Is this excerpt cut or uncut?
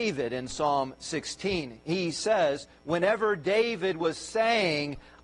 uncut